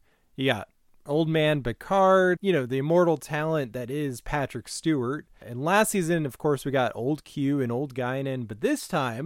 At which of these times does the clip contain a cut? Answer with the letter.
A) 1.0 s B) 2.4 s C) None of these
B